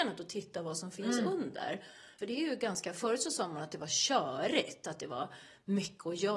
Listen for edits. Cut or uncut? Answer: cut